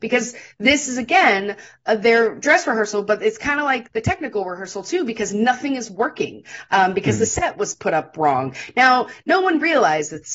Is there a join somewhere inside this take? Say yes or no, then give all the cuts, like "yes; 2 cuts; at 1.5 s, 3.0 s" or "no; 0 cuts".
no; 0 cuts